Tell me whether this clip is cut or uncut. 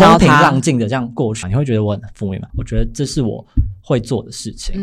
cut